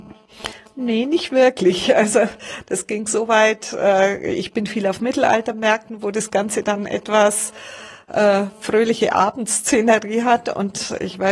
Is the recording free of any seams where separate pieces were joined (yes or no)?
yes